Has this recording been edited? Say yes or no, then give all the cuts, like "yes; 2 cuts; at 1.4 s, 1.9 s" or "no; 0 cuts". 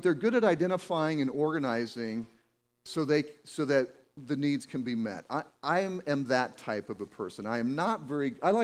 no; 0 cuts